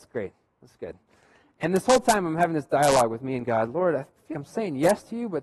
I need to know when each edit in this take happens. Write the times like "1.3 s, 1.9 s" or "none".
4.3 s